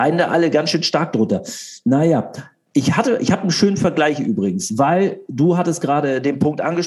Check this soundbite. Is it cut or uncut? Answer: uncut